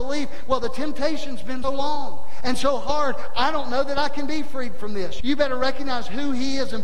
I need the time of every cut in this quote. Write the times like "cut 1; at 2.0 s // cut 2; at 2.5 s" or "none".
cut 1; at 1.6 s // cut 2; at 5.2 s